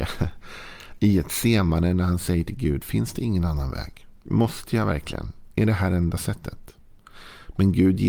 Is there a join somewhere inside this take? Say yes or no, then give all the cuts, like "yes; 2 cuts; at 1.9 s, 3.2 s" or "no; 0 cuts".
yes; 1 cut; at 4.2 s